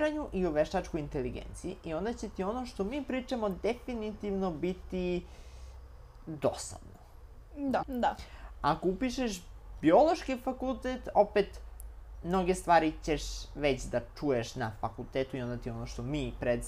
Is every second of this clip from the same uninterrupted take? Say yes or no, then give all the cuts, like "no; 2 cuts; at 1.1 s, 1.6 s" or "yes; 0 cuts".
no; 1 cut; at 7.8 s